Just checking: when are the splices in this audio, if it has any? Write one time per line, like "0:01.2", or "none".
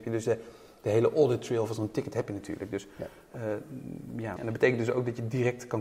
0:04.4